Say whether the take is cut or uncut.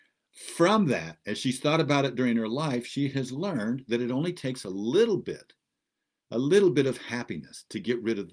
uncut